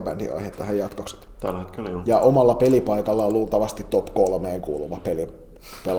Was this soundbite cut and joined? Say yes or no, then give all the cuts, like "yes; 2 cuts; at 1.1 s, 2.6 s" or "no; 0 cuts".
yes; 1 cut; at 1.3 s